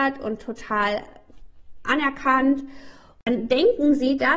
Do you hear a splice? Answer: no; 0 cuts

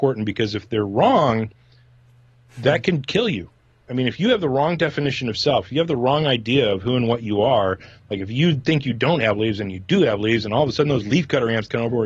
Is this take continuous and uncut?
yes; 0 cuts

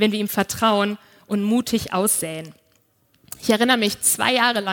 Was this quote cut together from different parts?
no; 0 cuts

